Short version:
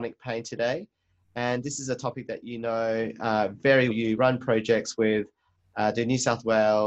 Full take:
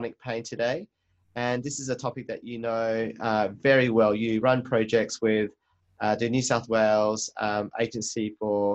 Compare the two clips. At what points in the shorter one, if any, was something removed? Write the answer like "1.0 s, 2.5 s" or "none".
3.9 s

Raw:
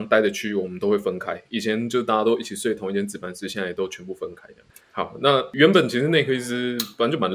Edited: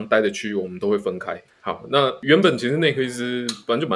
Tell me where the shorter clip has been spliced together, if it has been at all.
1.5 s

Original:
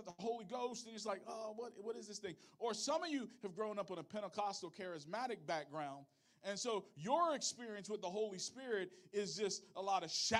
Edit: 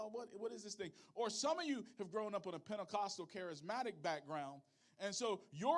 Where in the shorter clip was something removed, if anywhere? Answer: none

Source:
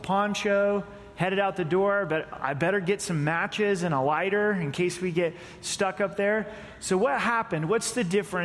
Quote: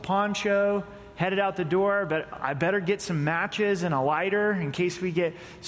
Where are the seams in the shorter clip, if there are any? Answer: none

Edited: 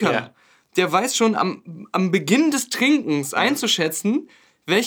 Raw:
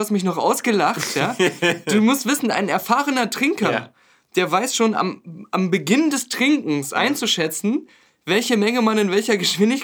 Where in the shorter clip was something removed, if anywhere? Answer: none

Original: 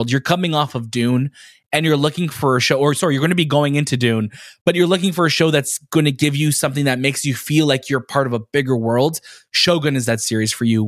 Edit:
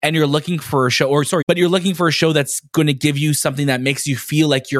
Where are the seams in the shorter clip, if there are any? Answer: 1.4 s

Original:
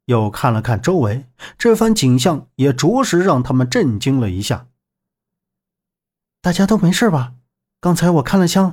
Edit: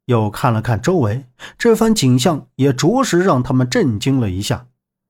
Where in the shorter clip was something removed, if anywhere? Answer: none

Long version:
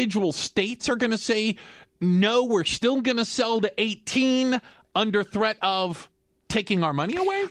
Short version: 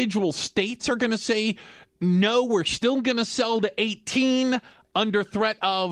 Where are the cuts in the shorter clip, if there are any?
none

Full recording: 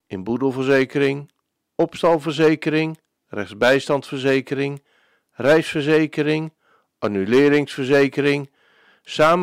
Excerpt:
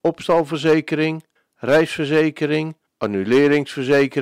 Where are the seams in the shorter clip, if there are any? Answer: 1.4 s, 2.9 s

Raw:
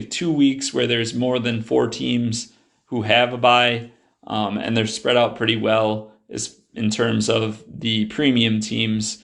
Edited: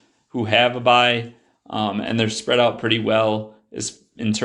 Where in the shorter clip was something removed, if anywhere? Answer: none

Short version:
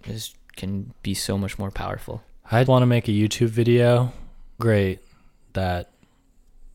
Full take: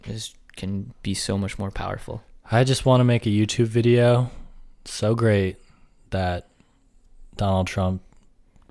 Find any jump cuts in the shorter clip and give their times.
2.7 s, 4.6 s

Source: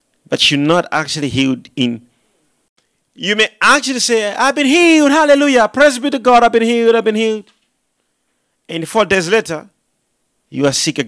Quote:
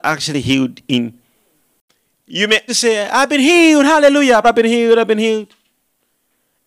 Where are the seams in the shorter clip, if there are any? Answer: 2.7 s, 4.4 s

